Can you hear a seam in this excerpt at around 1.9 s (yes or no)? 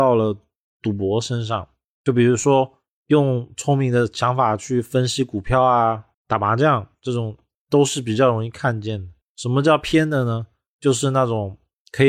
no